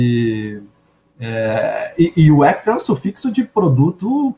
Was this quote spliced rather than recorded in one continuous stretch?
no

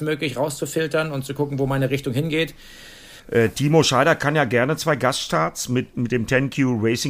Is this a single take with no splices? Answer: no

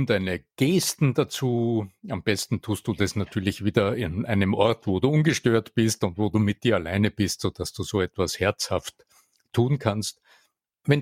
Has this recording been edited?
no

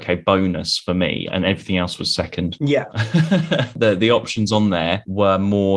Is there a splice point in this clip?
yes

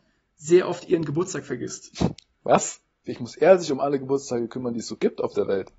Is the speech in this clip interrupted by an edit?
yes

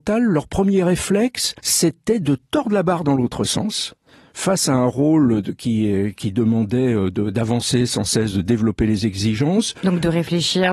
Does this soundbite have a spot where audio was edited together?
yes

